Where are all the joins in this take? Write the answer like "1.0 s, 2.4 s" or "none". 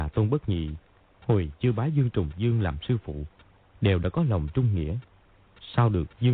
none

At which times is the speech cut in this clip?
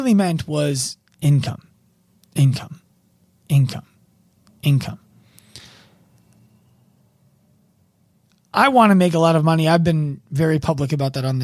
none

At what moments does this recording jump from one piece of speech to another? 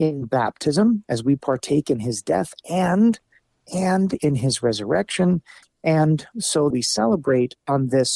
5.6 s, 6.7 s

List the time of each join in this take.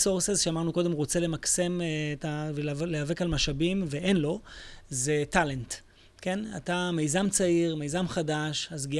none

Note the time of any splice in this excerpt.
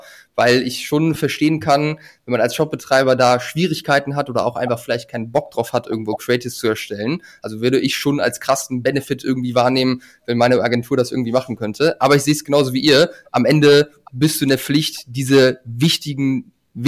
none

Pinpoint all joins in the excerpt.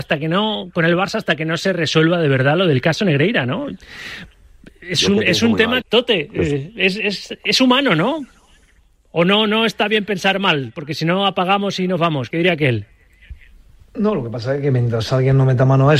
5.8 s, 12.3 s

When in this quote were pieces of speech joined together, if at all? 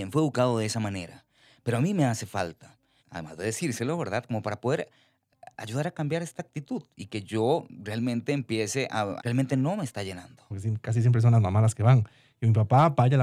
3.0 s, 9.2 s, 10.5 s

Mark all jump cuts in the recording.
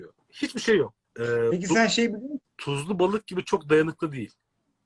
1.0 s, 2.4 s

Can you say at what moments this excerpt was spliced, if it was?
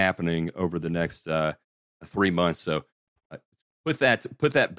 none

